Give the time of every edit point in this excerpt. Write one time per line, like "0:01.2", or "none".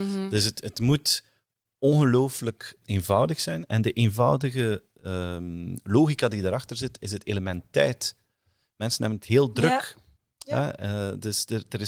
0:02.8